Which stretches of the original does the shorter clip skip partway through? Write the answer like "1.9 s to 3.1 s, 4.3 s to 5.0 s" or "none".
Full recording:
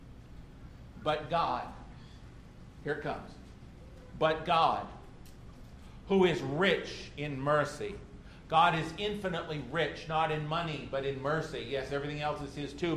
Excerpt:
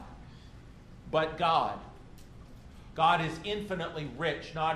2.7 s to 4.1 s, 6.0 s to 8.5 s